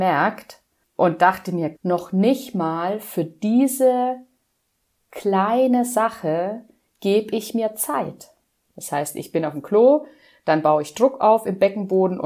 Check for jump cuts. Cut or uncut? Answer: cut